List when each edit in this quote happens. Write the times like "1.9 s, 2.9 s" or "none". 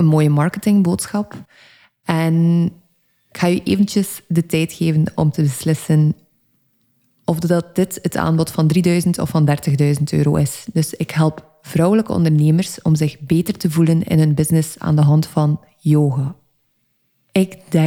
none